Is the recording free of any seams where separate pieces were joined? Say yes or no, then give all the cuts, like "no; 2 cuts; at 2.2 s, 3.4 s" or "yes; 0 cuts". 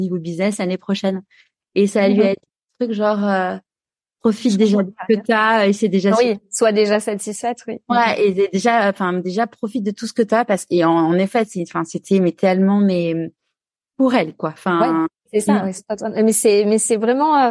yes; 0 cuts